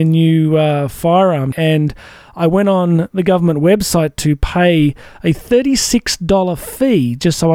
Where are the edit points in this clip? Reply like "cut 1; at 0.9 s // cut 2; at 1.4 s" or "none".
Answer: cut 1; at 1.5 s